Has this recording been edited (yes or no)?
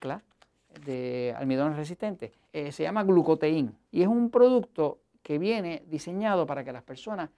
yes